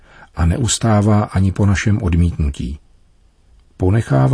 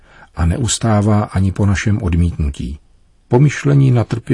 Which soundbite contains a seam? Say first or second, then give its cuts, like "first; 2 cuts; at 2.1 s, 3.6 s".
second; 1 cut; at 3.2 s